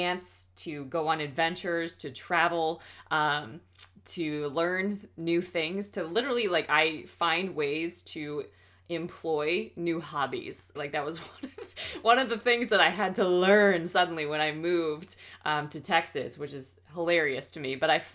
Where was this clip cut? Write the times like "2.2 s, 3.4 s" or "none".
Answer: 10.7 s